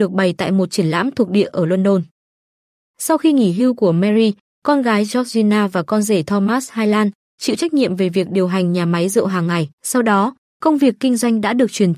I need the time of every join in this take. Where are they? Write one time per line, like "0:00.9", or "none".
0:09.7